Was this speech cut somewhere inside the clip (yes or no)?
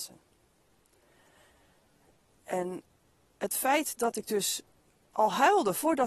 no